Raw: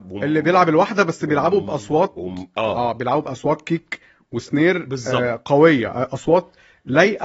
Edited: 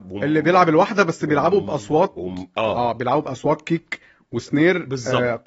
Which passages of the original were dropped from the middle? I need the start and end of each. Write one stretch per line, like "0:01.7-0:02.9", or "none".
none

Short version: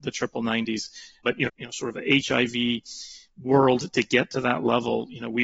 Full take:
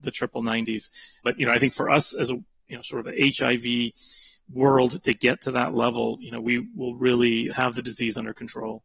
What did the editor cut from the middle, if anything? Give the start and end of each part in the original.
0:01.5-0:02.6

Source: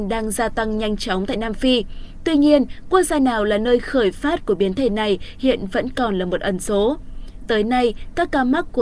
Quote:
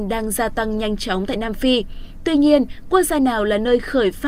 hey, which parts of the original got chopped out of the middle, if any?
none

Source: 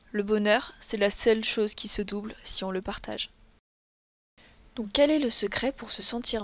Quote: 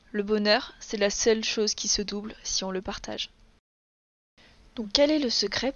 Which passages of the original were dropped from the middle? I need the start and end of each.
none

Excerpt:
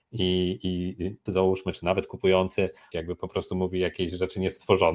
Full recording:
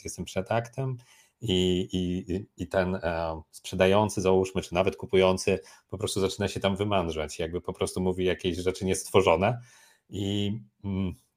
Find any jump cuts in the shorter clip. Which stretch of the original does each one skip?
0:02.5-0:04.1
0:05.8-0:07.4

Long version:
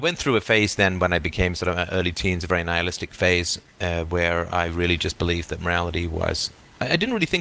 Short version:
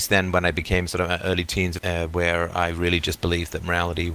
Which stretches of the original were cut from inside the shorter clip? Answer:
0:02.5-0:03.8

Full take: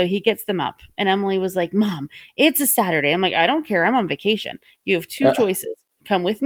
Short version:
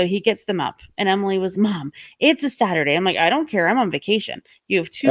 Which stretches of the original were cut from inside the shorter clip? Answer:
0:01.5-0:01.7

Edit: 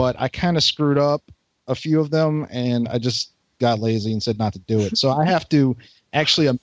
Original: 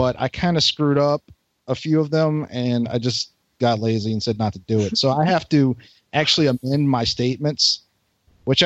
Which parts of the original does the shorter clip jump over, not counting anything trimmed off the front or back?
none

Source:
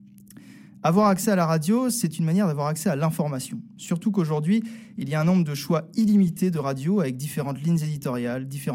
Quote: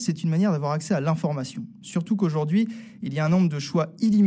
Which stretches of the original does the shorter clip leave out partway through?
none

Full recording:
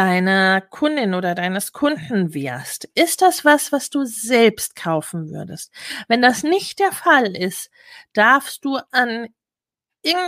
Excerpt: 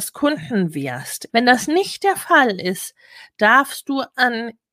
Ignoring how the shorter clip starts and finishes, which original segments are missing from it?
0:02.9-0:06.0

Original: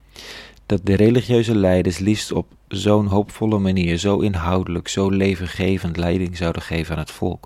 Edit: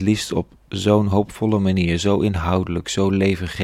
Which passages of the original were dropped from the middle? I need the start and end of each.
none

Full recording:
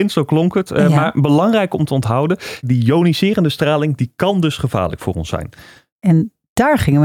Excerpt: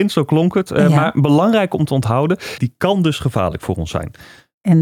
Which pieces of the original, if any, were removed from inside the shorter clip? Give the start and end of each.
0:02.6-0:04.0

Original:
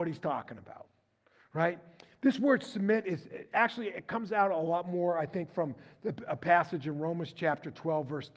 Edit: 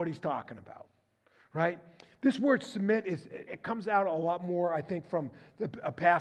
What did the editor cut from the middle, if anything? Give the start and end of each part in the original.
0:03.5-0:03.9

